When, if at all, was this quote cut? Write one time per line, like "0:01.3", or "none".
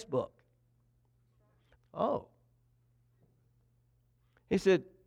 0:01.7